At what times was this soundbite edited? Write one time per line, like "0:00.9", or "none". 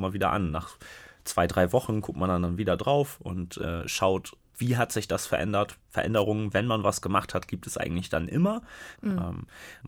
0:08.9